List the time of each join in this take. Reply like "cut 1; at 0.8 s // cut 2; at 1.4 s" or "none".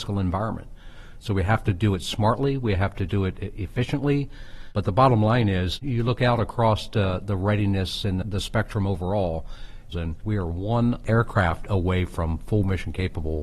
cut 1; at 8.2 s // cut 2; at 9.9 s